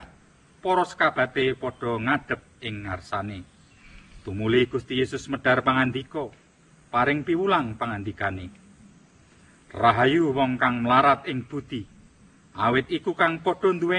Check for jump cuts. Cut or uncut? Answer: uncut